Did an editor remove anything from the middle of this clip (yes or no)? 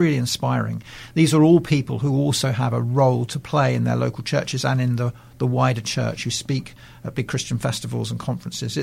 no